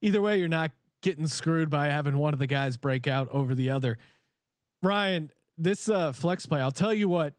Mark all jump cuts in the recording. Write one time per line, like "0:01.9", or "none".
none

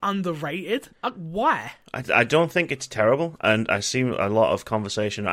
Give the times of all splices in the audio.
0:00.9
0:02.0

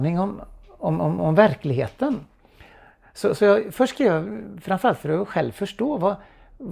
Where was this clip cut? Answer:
0:01.2

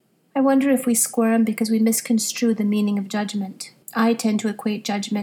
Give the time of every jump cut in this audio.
0:03.8

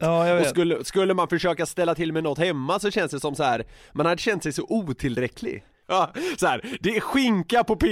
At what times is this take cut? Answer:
0:05.8

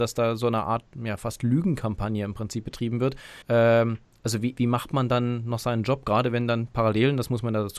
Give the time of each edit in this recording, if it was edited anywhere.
0:03.4
0:04.5

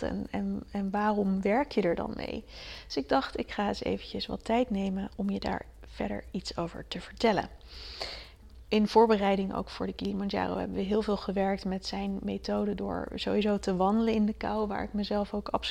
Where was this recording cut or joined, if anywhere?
0:08.7

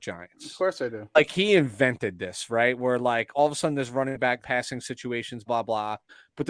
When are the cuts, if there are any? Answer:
0:04.4
0:05.5

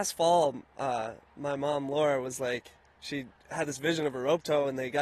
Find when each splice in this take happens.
0:01.2

